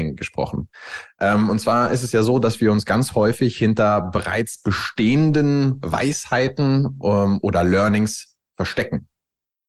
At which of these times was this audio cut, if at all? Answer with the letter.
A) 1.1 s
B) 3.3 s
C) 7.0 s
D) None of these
D